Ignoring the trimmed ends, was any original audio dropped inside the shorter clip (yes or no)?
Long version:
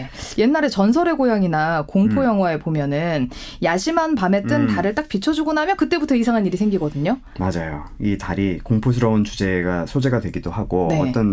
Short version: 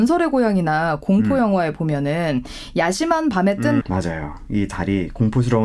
yes